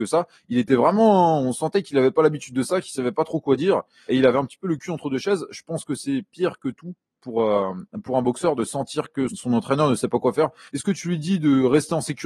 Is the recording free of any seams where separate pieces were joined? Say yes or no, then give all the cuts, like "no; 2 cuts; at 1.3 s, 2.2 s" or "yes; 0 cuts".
no; 3 cuts; at 4.1 s, 9.3 s, 10.7 s